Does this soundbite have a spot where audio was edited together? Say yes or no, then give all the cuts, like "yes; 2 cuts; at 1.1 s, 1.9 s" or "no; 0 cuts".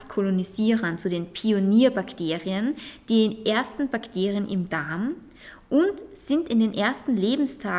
no; 0 cuts